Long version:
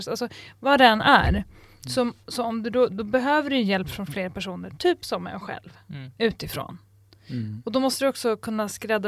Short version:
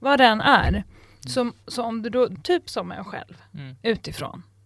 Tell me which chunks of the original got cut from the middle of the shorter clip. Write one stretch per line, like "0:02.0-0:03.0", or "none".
0:03.0-0:04.7